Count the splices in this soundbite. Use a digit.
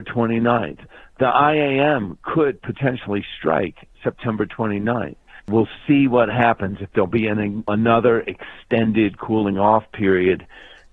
1